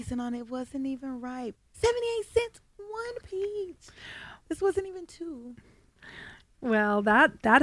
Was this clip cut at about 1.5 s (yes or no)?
yes